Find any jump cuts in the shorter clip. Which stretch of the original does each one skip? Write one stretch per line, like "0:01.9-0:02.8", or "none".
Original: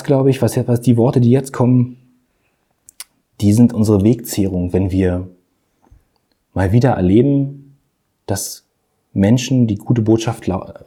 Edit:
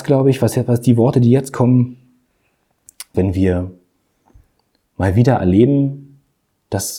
0:03.1-0:04.7